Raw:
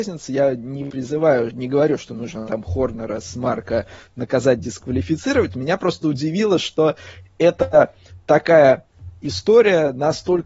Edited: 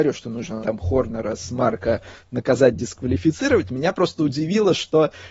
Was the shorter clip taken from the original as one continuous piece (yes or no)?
yes